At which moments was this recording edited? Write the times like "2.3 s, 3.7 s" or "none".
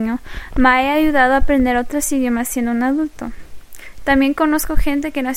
4.0 s